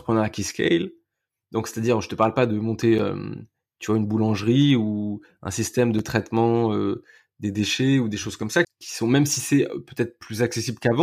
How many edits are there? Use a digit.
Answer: 1